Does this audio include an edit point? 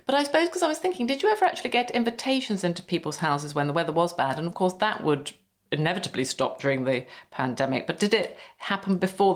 no; 0 cuts

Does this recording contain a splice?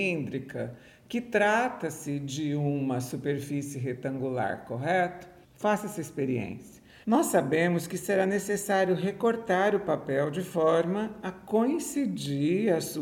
yes; 2 cuts; at 5.4 s, 7.0 s

